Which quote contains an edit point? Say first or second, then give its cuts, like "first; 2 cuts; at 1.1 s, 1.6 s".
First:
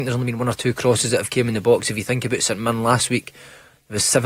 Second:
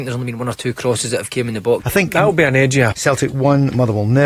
second; 2 cuts; at 1.8 s, 2.9 s